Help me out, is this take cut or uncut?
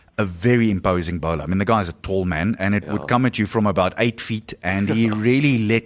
uncut